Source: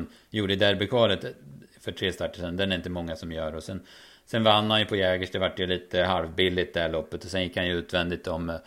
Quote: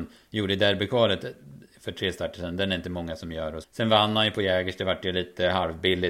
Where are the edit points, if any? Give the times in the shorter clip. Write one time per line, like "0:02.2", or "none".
0:03.6